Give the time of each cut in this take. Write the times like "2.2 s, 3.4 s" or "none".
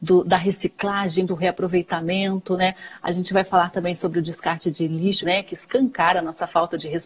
1.3 s, 5.2 s